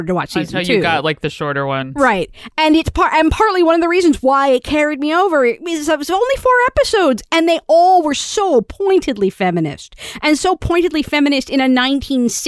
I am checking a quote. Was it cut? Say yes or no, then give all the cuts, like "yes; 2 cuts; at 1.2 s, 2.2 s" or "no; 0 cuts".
no; 0 cuts